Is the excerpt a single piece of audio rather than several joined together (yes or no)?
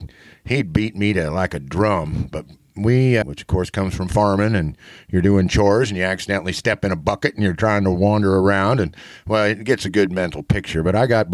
no